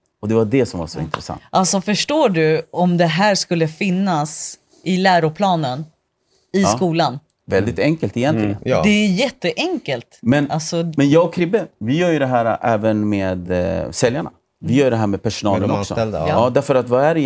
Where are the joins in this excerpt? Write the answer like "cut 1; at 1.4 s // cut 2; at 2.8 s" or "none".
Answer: none